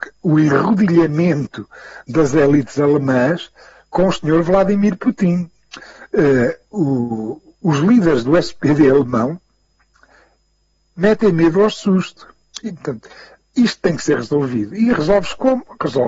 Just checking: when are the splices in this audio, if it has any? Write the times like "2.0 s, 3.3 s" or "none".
none